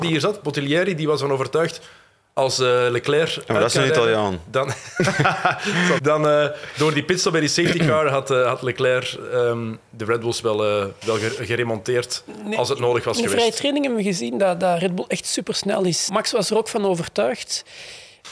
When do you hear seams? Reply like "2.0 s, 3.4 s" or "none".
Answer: 6.0 s, 16.1 s